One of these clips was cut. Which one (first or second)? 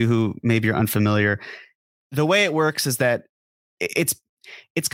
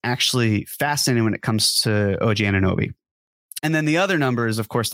second